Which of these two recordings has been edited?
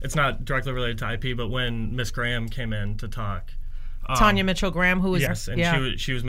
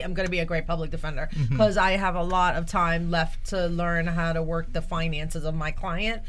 first; 1 cut; at 5.3 s

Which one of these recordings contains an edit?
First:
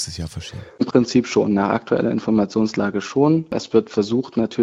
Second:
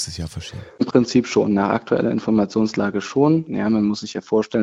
second; 1 cut; at 3.5 s

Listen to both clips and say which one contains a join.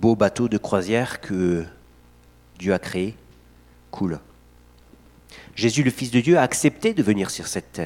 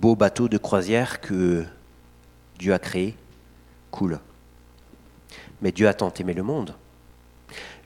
first; 1 cut; at 5.5 s

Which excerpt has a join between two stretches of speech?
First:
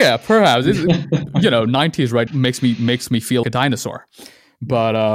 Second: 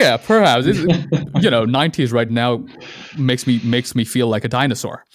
first; 2 cuts; at 2.3 s, 3.4 s

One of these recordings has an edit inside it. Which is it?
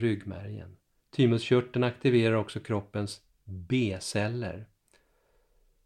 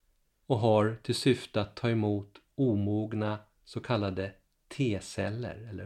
first; 1 cut; at 1.0 s

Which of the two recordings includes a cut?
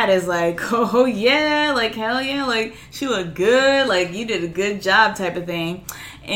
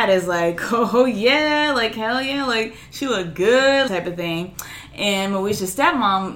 second; 1 cut; at 3.9 s

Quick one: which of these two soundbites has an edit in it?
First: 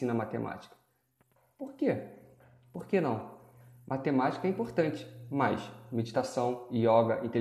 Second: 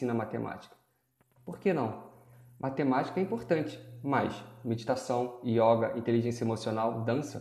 second; 1 cut; at 1.4 s

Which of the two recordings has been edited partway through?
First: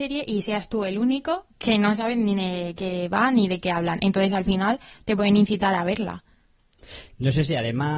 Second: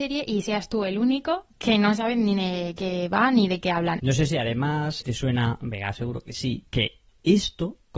second; 2 cuts; at 4.0 s, 5.0 s

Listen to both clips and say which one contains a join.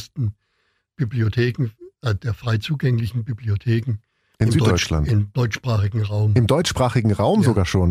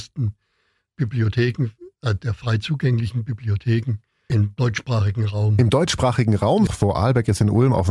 second; 2 cuts; at 4.3 s, 6.7 s

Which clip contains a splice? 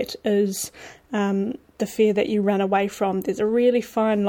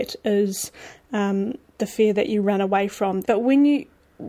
second; 1 cut; at 3.2 s

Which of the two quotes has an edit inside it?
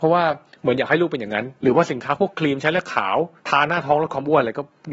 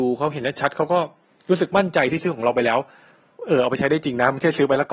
first; 2 cuts; at 1.6 s, 3.4 s

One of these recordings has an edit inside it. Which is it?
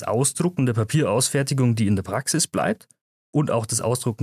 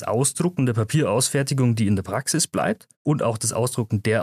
second; 1 cut; at 2.9 s

